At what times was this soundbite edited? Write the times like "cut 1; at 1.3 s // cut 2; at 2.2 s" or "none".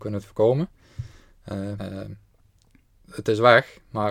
cut 1; at 1.8 s